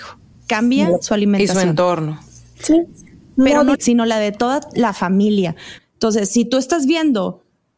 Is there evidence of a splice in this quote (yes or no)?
yes